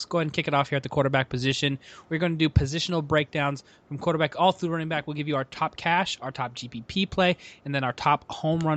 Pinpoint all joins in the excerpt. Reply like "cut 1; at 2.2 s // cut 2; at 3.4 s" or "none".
none